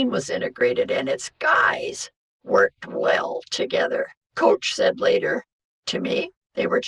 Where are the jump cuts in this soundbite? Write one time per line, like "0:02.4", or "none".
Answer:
0:04.2